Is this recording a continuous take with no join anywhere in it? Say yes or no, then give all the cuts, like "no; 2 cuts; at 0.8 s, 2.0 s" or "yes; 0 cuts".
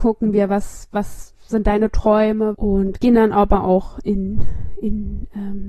no; 1 cut; at 2.5 s